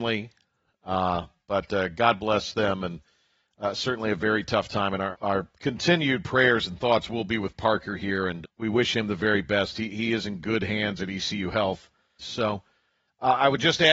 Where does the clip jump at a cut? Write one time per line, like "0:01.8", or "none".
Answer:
0:05.1
0:08.4
0:12.2